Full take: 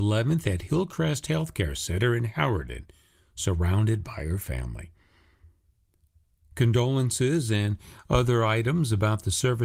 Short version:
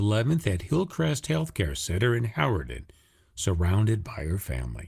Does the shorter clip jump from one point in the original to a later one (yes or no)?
no